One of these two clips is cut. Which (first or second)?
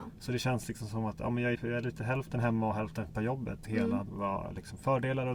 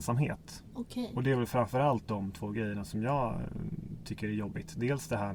first